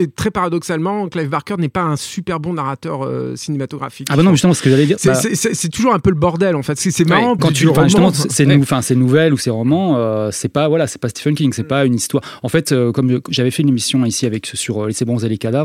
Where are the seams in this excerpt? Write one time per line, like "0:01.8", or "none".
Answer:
0:07.4